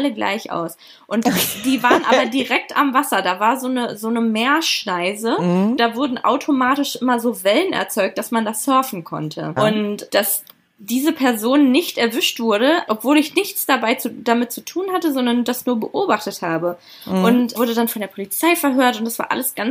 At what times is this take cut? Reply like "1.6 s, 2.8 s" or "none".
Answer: 9.6 s, 12.9 s, 17.6 s